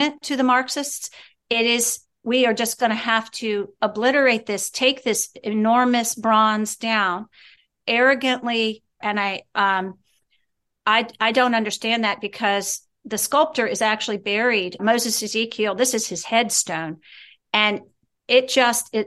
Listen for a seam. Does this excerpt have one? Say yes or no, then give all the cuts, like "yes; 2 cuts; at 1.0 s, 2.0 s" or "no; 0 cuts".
yes; 2 cuts; at 9.0 s, 14.8 s